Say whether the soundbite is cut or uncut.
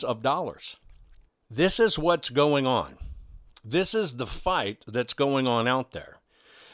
cut